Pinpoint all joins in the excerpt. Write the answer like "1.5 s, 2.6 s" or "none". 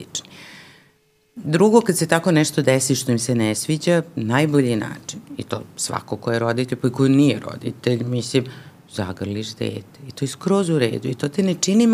none